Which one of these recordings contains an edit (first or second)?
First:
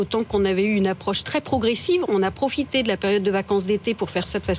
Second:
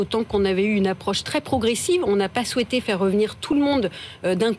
first